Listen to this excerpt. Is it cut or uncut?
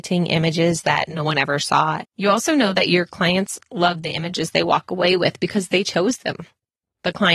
cut